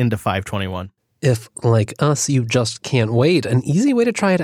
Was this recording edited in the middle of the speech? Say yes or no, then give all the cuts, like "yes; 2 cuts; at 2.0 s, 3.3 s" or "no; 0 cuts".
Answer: no; 0 cuts